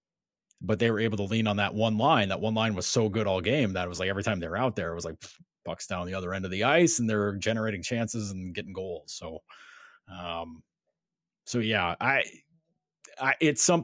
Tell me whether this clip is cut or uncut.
uncut